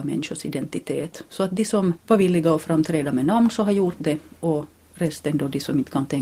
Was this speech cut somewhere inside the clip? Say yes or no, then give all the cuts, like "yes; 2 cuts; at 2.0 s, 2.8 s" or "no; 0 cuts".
no; 0 cuts